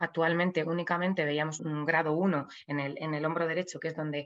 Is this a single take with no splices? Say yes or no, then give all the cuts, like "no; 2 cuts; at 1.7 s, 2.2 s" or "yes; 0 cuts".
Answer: no; 1 cut; at 1.6 s